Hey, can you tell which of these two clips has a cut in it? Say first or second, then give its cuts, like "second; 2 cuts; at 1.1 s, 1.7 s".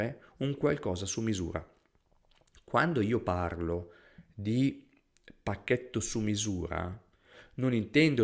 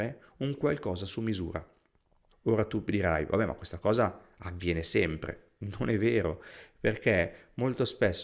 second; 1 cut; at 2.3 s